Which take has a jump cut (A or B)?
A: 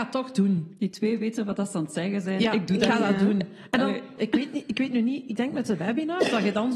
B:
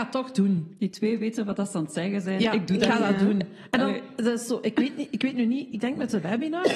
A